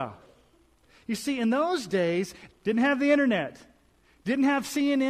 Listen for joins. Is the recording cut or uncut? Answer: cut